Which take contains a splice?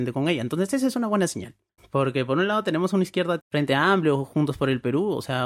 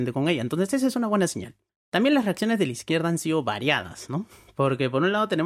first; 2 cuts; at 1.8 s, 3.4 s

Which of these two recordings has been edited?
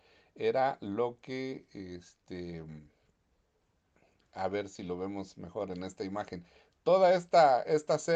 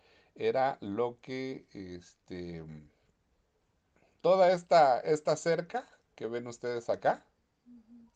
second; 1 cut; at 4.2 s

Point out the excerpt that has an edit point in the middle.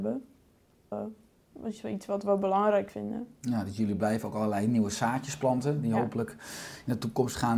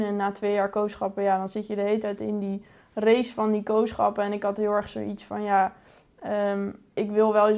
first; 1 cut; at 0.9 s

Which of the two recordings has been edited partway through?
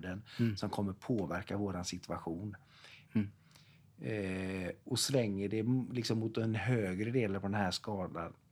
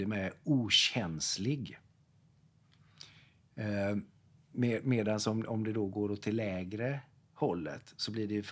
first; 2 cuts; at 3.1 s, 4.8 s

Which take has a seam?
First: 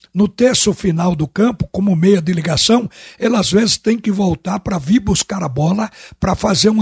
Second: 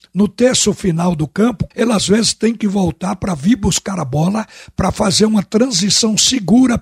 second; 1 cut; at 1.7 s

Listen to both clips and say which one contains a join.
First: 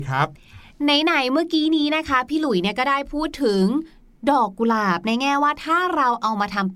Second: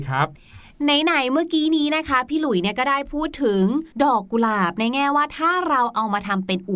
second; 1 cut; at 3.9 s

